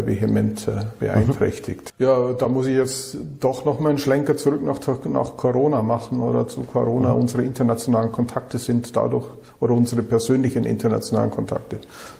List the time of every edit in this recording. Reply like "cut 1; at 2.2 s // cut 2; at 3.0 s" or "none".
cut 1; at 1.9 s